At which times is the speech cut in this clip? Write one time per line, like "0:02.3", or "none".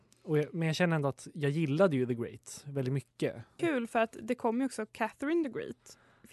0:03.6